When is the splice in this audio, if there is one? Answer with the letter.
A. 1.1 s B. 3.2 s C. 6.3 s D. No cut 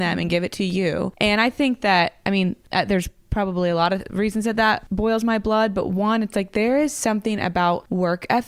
D